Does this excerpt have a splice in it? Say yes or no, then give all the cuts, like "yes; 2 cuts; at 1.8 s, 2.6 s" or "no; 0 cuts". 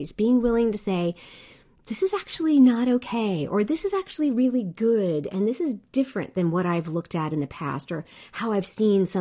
no; 0 cuts